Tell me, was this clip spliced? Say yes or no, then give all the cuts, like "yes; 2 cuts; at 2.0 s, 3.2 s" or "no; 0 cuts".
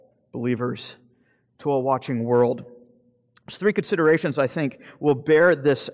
no; 0 cuts